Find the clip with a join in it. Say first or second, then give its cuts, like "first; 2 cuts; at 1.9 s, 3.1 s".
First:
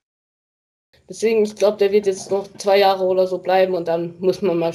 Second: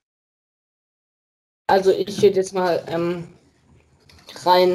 first; 1 cut; at 0.9 s